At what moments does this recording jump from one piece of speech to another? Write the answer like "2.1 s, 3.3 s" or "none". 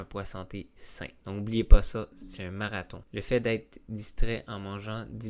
1.2 s, 3.0 s